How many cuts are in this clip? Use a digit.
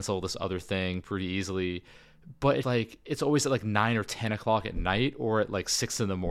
1